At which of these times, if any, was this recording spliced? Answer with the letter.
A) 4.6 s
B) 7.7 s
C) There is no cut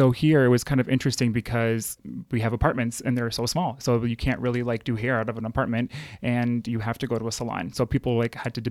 C